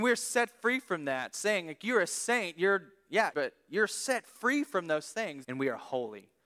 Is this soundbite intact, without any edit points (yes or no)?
no